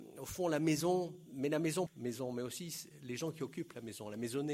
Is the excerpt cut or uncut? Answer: cut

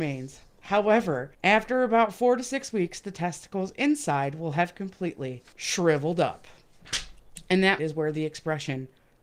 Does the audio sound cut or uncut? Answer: cut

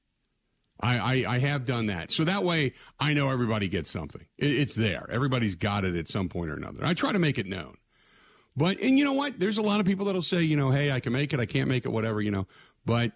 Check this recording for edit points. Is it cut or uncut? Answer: uncut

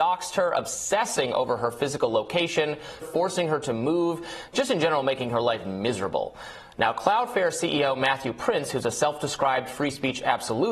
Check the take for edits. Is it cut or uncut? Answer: cut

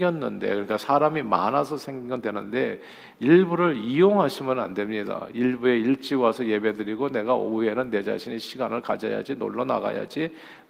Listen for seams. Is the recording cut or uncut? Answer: uncut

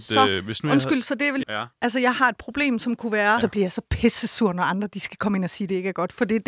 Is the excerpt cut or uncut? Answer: cut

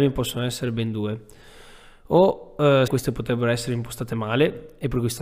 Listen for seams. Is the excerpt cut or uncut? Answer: cut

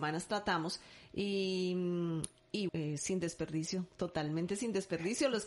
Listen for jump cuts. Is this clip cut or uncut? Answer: cut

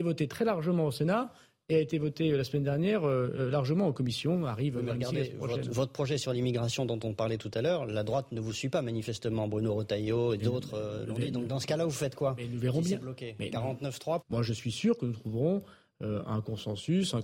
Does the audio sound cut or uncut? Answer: cut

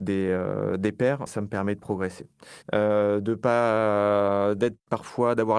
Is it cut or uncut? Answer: cut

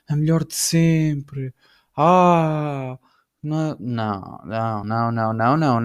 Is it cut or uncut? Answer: cut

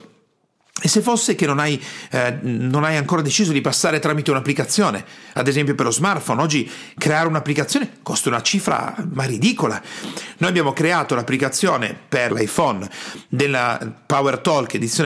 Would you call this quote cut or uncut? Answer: cut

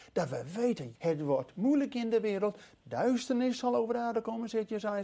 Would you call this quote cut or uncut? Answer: cut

